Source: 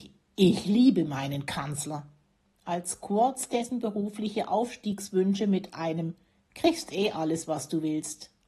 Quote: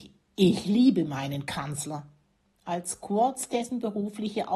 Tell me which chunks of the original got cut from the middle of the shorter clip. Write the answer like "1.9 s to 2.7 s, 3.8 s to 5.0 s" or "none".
none